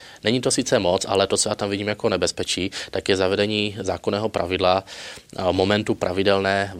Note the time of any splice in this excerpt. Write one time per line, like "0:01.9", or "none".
none